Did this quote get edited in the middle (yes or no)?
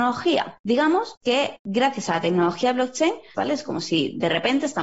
yes